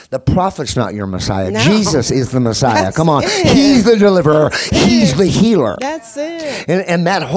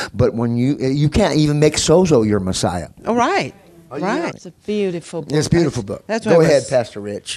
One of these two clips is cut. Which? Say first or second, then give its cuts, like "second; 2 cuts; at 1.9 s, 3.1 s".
second; 2 cuts; at 3.0 s, 4.3 s